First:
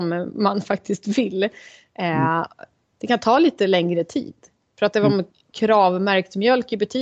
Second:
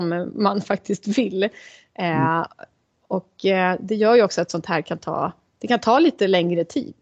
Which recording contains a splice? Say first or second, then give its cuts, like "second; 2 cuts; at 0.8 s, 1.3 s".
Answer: first; 1 cut; at 2.9 s